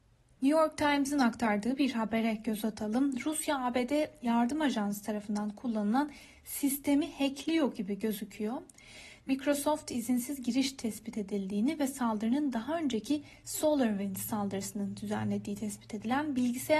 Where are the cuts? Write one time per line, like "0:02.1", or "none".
none